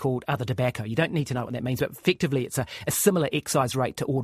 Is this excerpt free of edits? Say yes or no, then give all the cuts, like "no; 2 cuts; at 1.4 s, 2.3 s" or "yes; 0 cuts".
yes; 0 cuts